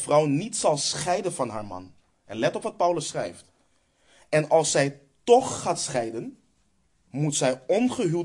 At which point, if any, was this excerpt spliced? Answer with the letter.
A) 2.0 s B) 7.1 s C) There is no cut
B